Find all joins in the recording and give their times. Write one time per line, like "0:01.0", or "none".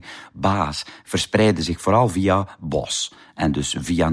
none